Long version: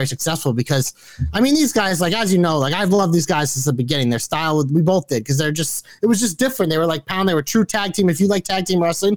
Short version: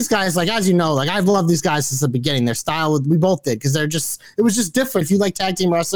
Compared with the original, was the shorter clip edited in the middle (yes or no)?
yes